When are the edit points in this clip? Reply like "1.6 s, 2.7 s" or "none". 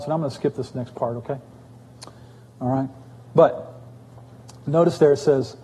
none